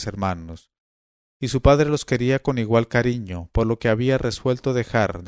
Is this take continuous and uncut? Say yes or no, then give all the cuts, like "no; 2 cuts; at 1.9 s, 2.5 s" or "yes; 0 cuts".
yes; 0 cuts